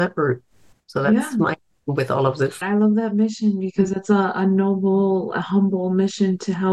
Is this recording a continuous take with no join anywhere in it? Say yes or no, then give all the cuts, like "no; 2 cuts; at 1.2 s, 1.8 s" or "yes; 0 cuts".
no; 1 cut; at 2.6 s